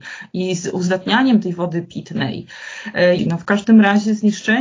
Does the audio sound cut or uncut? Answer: cut